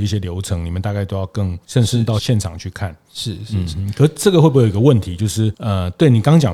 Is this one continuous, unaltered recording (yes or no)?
no